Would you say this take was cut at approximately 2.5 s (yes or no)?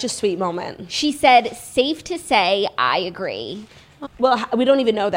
no